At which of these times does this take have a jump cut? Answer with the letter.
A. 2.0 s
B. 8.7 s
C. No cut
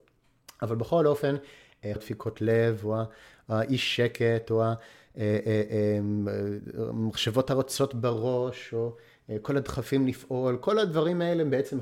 A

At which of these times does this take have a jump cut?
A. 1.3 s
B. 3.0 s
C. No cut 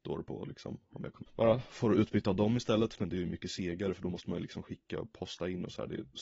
A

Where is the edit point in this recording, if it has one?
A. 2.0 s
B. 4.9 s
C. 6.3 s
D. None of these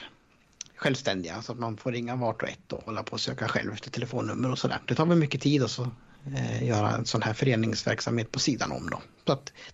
B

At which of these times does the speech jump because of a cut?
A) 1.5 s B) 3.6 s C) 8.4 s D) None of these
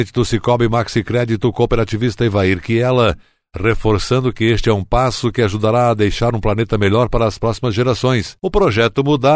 D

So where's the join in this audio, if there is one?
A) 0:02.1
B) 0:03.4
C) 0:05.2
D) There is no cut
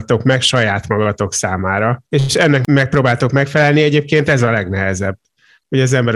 A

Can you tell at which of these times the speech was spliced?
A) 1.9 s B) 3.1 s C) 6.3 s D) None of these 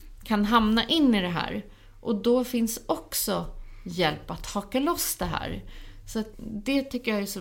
C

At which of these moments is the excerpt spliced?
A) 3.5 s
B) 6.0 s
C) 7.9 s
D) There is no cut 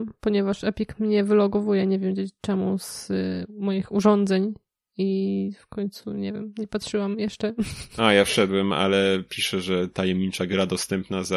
D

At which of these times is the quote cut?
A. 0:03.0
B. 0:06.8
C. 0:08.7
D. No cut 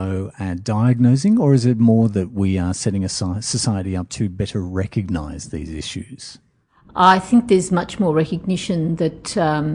D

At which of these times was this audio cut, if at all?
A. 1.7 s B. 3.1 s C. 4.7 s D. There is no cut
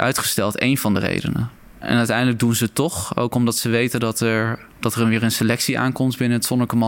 C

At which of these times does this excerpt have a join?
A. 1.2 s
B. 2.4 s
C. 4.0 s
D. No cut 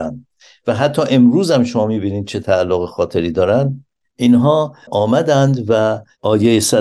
B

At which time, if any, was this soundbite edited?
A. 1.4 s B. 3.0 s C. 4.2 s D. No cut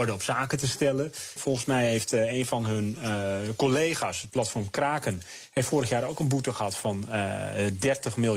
A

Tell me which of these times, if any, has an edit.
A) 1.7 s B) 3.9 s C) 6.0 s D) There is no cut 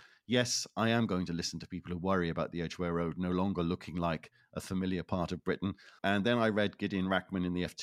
C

